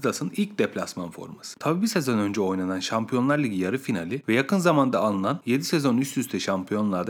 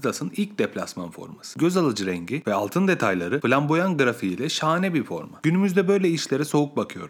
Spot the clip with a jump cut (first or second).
first